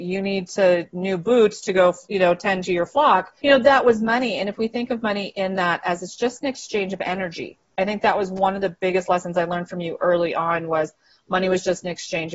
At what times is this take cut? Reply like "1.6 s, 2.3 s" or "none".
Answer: 3.4 s